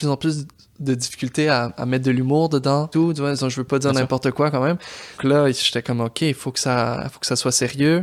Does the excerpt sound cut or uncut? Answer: cut